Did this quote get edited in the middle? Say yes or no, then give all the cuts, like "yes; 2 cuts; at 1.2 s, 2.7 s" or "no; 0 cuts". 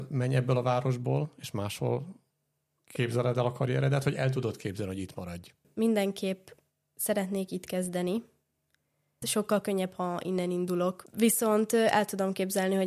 yes; 1 cut; at 9.2 s